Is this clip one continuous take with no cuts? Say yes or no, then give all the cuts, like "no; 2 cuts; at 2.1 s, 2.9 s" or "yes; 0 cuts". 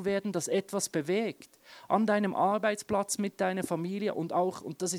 yes; 0 cuts